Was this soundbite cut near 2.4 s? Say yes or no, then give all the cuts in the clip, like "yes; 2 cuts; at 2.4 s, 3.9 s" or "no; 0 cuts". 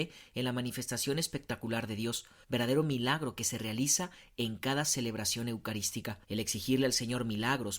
yes; 2 cuts; at 2.4 s, 6.2 s